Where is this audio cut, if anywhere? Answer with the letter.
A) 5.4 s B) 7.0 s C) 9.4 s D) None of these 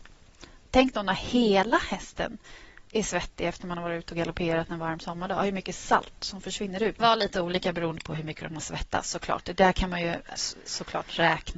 B